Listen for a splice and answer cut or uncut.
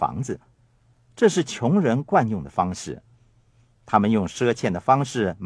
uncut